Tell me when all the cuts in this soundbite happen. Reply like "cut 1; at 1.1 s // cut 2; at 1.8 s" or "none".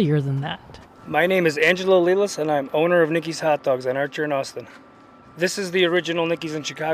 none

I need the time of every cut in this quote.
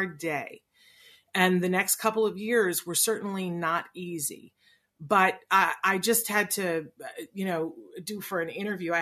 none

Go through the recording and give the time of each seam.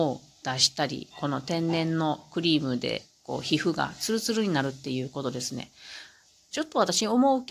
none

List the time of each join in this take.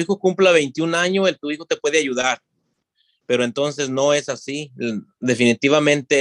none

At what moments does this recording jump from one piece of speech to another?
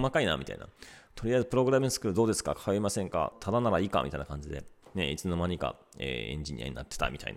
cut 1; at 3.3 s // cut 2; at 4.8 s

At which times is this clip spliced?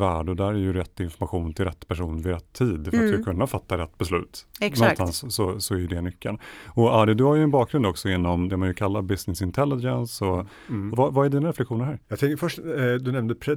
cut 1; at 10.9 s // cut 2; at 12.0 s

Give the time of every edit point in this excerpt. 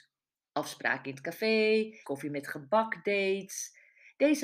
cut 1; at 2.0 s

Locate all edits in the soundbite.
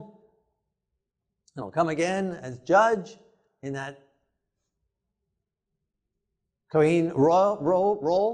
none

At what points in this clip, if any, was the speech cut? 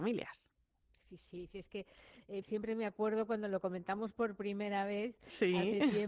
cut 1; at 2.4 s

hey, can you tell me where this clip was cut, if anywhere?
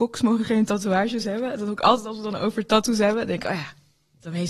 none

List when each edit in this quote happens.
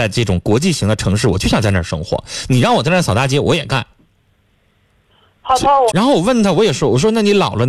cut 1; at 5.9 s

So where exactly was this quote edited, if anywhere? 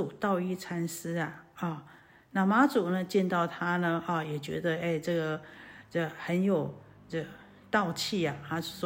none

